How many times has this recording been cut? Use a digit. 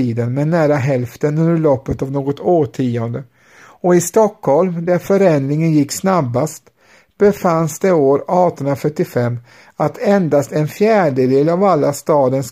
0